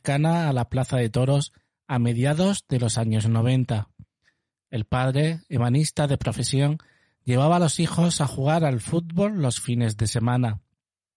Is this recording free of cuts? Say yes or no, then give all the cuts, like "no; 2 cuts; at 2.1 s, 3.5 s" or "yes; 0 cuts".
yes; 0 cuts